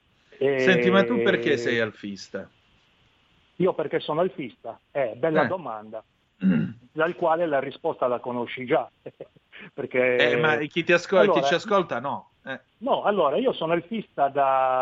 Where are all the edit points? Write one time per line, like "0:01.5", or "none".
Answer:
0:12.7